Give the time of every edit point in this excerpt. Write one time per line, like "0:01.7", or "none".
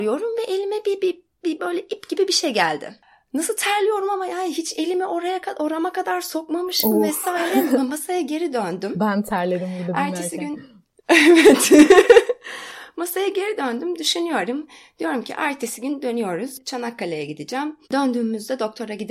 0:17.8

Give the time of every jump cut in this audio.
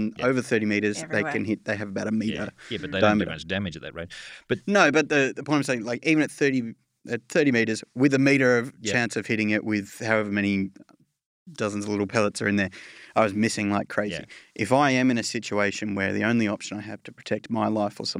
none

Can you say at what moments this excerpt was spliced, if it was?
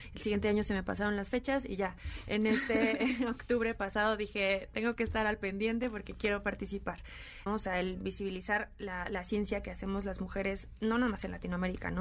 0:07.5

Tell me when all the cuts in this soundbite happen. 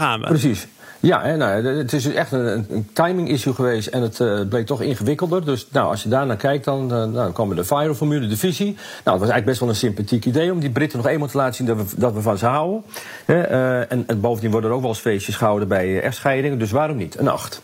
0:02.7

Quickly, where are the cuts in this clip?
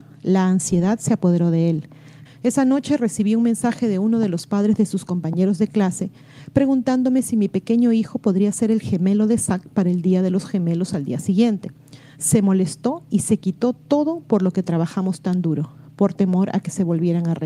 0:02.2
0:12.1

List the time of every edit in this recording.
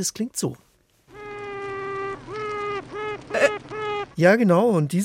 0:04.1

